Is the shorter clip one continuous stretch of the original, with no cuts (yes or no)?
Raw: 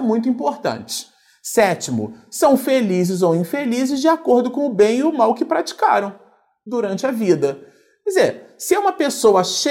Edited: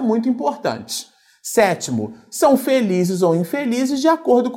yes